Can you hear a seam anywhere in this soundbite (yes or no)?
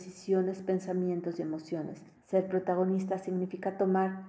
yes